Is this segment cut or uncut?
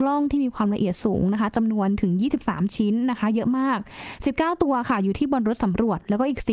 uncut